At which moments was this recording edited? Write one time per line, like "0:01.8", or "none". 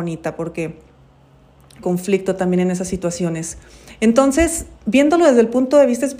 0:01.8